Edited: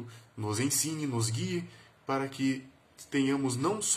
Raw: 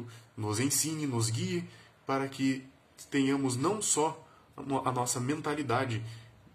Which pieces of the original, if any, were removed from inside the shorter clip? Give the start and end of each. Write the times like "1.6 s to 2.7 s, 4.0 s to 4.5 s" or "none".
none